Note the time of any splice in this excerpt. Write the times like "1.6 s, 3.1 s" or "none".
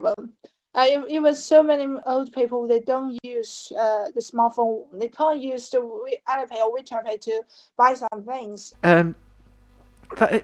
4.9 s, 8.7 s